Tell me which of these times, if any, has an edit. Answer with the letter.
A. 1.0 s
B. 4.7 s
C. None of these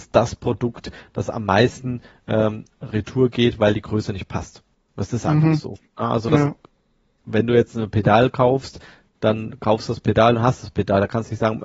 C